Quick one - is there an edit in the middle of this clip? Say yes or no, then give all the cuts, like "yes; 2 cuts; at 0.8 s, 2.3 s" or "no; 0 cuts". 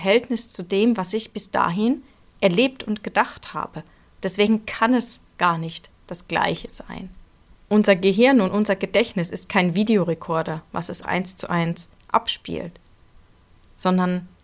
yes; 2 cuts; at 7.6 s, 11.0 s